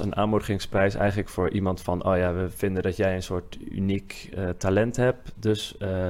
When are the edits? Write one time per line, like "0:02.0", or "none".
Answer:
none